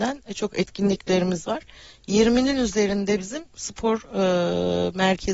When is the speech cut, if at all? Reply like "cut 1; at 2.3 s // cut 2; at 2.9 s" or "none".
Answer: none